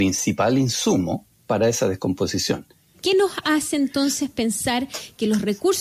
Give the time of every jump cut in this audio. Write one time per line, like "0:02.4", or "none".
0:02.9